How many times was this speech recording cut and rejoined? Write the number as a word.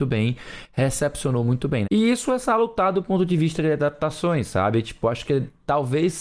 one